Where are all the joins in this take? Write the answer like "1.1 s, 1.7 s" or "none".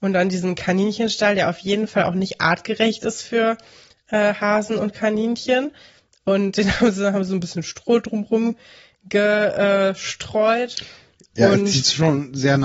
none